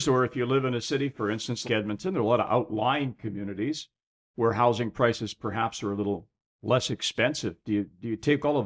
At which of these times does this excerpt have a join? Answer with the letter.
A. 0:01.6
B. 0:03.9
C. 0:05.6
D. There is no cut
A